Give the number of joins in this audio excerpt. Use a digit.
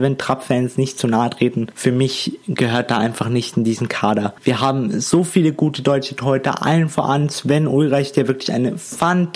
0